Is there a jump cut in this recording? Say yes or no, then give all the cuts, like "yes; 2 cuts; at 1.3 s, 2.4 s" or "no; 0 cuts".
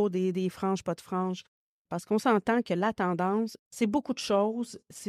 yes; 2 cuts; at 1.9 s, 3.6 s